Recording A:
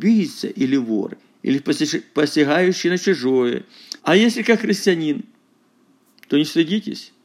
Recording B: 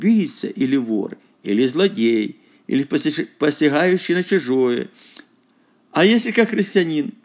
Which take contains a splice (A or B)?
A